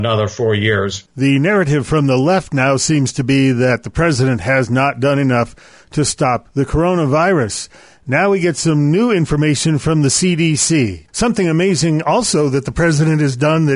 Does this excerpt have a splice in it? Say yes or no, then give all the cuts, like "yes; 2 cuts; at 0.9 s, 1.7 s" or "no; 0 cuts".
yes; 1 cut; at 11.1 s